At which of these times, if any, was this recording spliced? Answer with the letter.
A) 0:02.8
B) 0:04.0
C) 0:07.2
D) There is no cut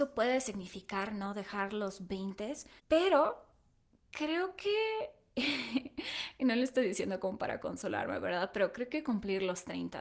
A